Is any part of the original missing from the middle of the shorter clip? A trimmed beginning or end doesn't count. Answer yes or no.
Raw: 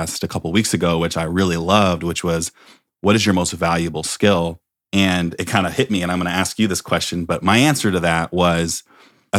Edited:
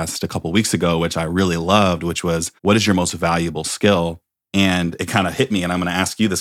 yes